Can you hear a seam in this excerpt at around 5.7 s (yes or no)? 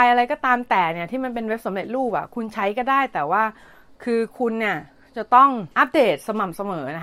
yes